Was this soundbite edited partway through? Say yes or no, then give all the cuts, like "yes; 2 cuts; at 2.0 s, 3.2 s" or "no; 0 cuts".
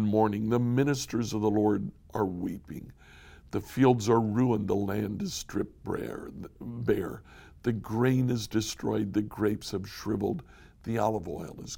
no; 0 cuts